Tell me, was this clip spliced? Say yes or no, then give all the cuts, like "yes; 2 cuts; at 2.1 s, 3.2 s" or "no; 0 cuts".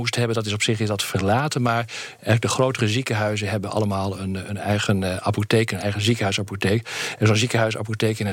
no; 0 cuts